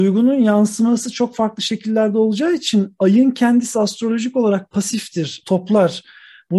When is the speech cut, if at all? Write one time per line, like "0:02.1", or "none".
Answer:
0:05.4